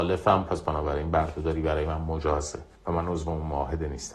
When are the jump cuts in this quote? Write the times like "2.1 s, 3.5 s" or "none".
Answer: 2.7 s